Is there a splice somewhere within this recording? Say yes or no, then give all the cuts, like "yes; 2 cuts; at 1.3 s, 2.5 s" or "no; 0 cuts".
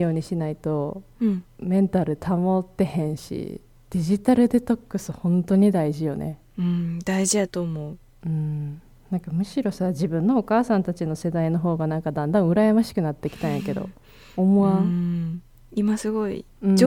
no; 0 cuts